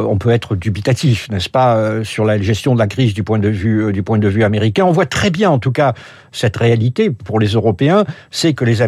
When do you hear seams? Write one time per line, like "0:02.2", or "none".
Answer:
none